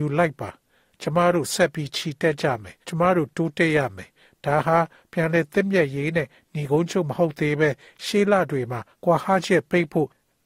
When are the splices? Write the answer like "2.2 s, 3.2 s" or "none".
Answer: 2.8 s, 8.9 s